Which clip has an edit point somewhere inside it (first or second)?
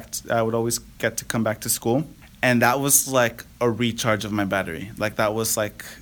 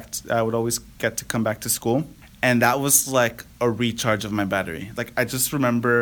second